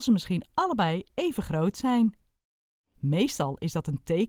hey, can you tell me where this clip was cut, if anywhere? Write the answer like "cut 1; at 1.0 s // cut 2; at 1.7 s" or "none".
cut 1; at 2.9 s